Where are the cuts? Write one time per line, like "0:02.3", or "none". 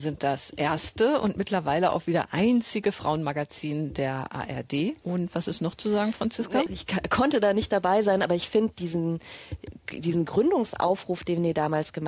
0:06.7